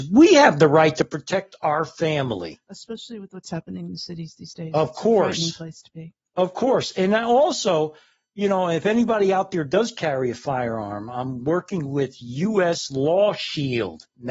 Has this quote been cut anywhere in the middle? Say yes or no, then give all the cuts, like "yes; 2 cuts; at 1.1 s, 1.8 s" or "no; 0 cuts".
no; 0 cuts